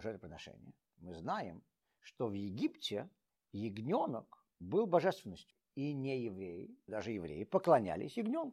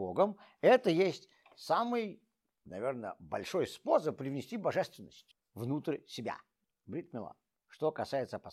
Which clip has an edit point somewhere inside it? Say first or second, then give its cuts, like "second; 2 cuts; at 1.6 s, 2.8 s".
first; 1 cut; at 6.9 s